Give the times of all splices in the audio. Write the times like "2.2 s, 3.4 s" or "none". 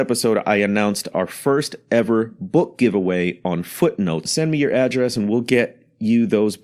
4.2 s